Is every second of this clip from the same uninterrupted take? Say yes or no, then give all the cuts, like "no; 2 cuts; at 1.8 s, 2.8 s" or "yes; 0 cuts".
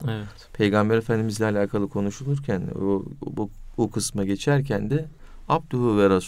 yes; 0 cuts